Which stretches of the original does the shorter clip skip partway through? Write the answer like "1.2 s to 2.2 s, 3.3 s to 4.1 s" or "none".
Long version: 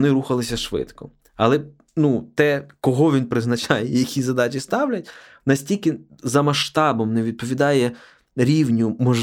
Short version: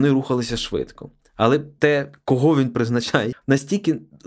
1.8 s to 2.3 s, 3.9 s to 5.3 s